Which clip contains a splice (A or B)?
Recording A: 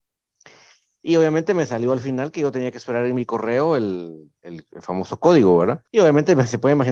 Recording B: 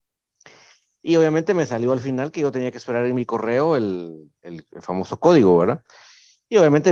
A